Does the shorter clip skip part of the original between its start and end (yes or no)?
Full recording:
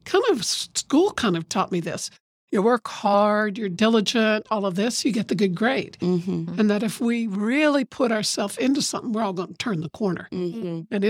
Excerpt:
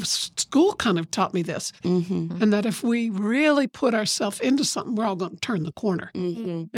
yes